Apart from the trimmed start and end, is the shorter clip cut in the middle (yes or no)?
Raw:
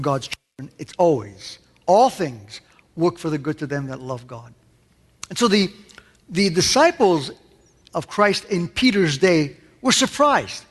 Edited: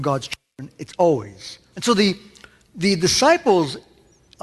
yes